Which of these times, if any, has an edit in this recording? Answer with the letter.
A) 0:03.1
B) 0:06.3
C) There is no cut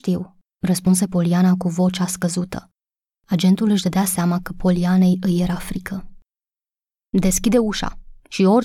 C